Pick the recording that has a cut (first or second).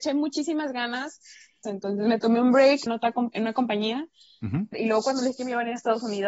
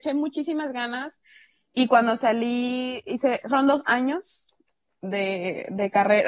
first